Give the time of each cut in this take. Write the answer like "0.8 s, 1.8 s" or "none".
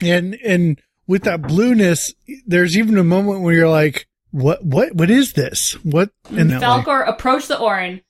6.5 s